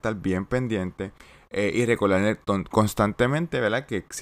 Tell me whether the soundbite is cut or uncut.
uncut